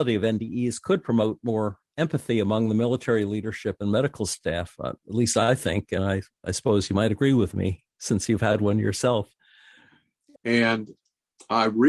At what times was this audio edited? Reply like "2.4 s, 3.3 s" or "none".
10.4 s